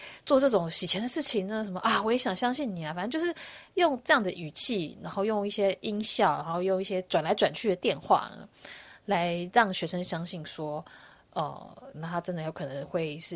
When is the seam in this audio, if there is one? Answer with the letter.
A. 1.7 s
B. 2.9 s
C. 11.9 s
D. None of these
C